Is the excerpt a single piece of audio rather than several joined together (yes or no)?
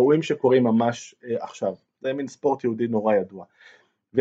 yes